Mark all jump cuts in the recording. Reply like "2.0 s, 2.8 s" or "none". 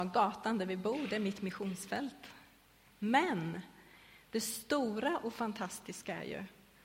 2.9 s